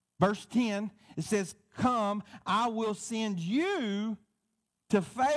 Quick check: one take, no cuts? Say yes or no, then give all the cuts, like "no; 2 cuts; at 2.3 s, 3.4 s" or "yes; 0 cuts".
yes; 0 cuts